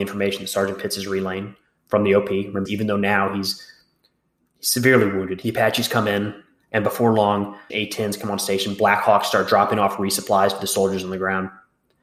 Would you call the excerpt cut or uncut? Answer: cut